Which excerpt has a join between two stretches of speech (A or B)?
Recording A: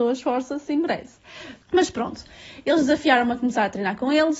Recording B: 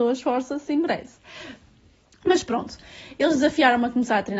A